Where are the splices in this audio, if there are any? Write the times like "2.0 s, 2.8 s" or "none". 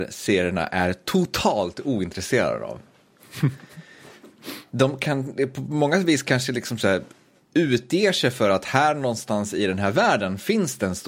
none